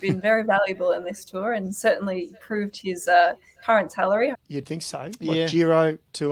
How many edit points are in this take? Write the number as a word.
one